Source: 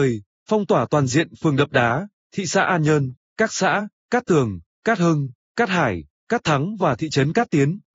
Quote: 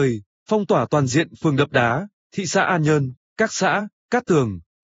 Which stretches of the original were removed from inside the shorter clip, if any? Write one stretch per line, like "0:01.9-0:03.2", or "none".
none

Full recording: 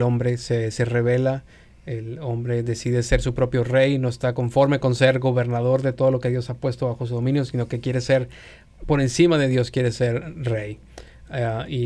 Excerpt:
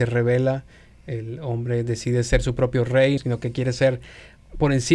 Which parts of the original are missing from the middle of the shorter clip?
0:04.0-0:07.5

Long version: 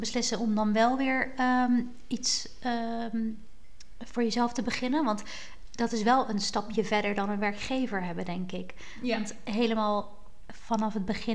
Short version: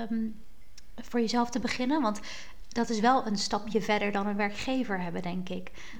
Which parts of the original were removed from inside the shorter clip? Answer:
none

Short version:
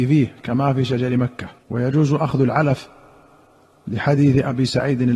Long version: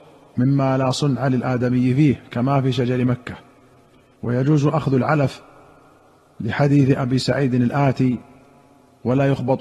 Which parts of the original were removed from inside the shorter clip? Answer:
0:03.5-0:04.1

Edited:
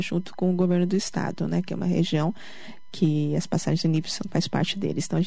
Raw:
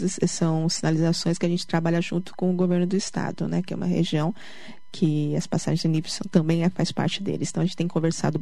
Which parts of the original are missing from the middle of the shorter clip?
0:06.3-0:06.7

